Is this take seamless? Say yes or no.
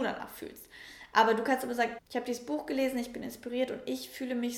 no